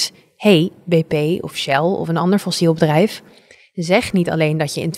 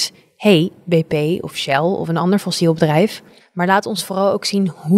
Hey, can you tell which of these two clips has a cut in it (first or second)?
second